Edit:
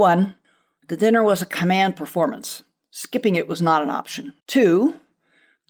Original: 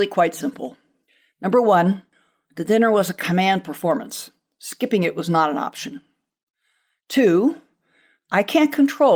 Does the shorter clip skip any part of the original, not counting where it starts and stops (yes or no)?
yes